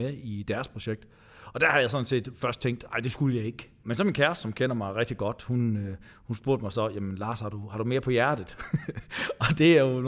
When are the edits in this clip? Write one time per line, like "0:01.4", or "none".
none

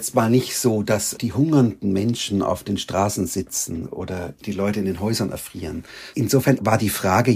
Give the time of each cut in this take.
0:06.1

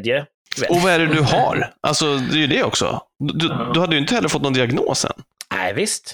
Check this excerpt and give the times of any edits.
none

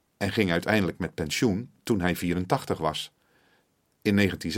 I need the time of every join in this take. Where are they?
none

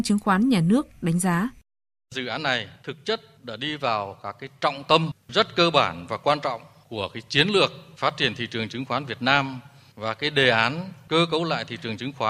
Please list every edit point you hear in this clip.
none

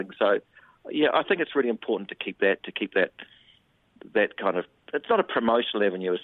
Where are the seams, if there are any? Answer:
none

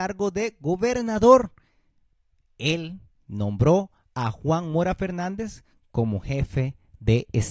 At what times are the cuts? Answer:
none

